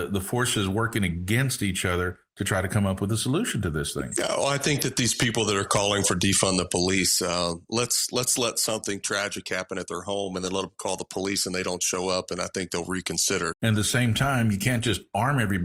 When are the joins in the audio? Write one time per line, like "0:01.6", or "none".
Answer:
0:13.5